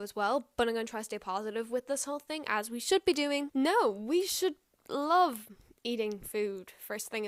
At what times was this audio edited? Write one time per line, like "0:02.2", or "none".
0:03.5